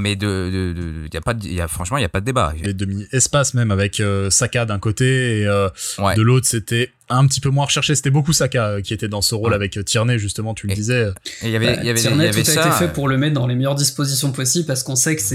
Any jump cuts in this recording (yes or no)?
yes